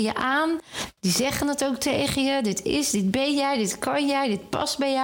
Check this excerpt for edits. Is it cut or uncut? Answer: uncut